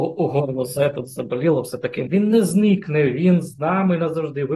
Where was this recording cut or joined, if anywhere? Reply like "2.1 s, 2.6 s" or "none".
2.1 s